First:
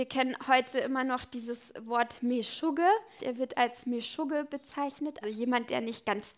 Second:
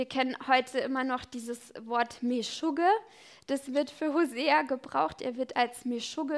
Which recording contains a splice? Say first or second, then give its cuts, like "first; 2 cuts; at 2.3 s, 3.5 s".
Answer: first; 2 cuts; at 3.2 s, 5.2 s